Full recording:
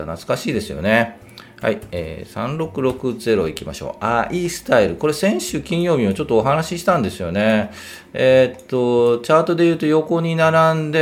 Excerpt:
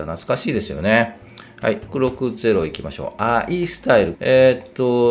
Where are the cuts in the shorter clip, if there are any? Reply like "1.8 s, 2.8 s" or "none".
1.9 s, 4.1 s